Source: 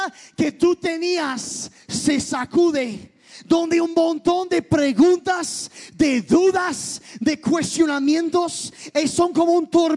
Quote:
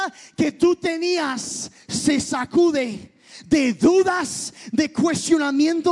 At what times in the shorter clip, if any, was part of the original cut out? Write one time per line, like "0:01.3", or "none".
0:03.4